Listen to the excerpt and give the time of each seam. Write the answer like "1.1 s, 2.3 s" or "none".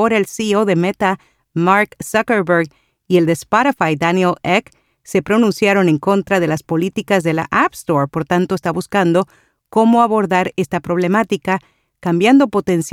8.1 s